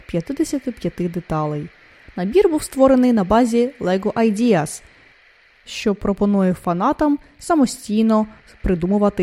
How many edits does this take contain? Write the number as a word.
one